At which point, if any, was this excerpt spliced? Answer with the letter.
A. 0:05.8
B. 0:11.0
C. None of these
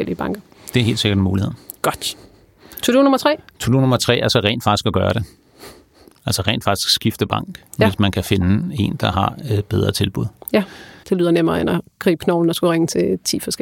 B